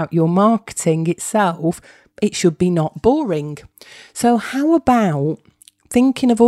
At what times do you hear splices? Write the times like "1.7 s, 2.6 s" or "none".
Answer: none